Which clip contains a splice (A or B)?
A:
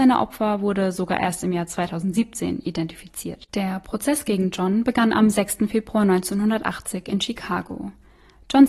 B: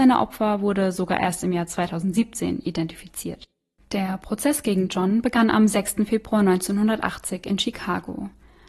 A